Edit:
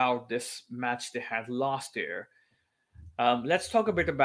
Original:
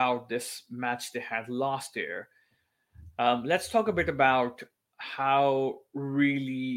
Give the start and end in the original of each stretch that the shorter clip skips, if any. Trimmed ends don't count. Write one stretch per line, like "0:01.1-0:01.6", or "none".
none